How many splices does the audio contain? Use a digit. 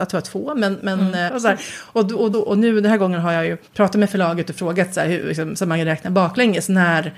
3